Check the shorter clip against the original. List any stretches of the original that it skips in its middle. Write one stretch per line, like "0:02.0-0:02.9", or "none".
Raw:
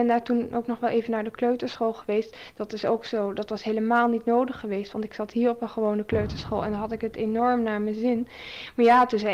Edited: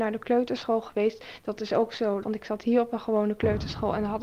0:03.3-0:04.9